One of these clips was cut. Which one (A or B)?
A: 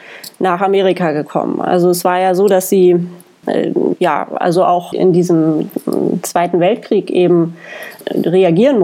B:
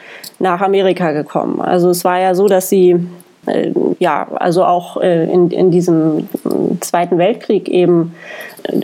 A